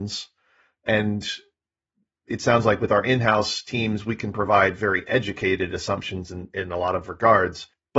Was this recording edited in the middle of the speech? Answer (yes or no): no